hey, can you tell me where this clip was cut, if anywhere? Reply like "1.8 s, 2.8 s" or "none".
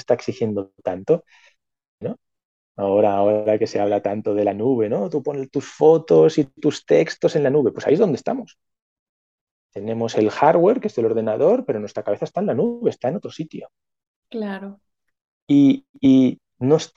2.0 s